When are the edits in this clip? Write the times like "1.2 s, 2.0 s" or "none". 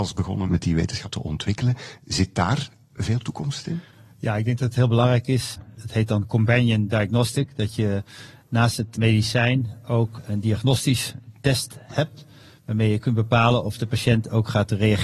none